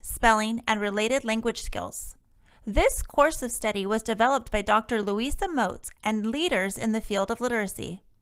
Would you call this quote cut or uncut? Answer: uncut